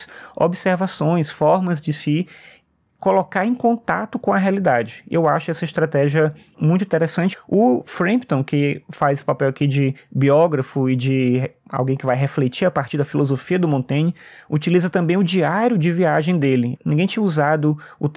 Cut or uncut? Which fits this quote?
cut